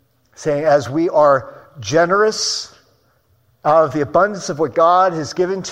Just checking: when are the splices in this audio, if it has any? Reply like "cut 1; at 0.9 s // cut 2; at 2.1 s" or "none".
none